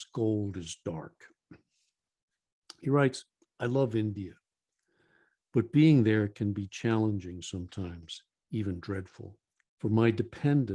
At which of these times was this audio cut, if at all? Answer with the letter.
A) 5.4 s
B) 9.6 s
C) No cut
B